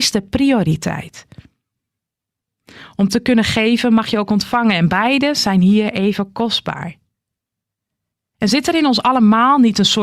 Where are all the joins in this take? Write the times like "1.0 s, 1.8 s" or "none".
none